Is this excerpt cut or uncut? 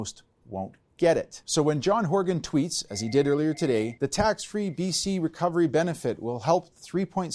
uncut